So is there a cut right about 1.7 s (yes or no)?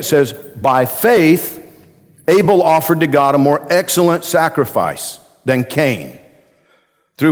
no